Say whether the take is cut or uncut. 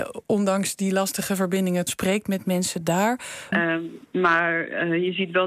cut